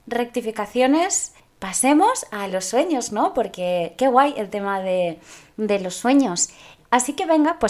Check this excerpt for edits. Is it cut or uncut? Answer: uncut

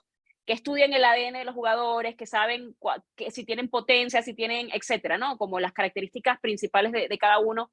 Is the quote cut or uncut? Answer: uncut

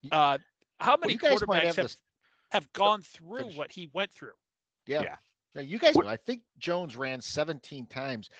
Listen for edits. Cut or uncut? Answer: cut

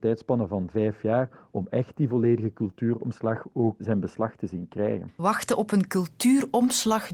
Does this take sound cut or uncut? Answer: cut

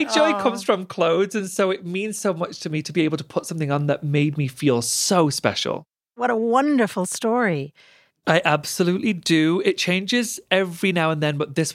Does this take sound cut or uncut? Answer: cut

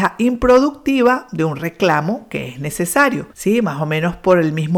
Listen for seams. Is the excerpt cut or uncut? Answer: cut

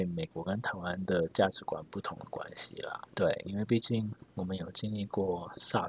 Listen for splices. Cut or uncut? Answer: cut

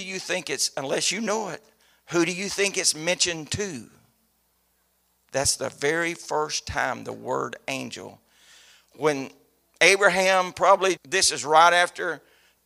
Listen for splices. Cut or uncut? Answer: cut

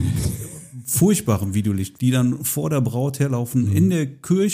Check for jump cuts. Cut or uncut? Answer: cut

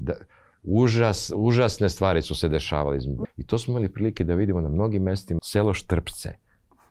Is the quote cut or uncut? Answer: cut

